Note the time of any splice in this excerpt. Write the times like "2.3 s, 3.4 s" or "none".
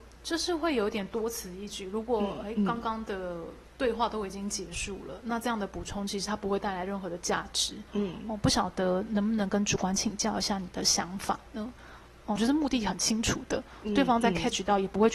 7.9 s, 12.4 s